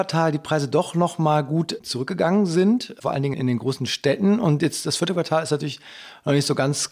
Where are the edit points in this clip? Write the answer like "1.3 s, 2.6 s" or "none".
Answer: 3.3 s